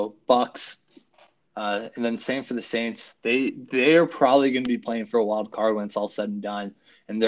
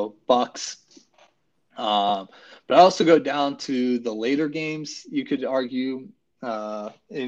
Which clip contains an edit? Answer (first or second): first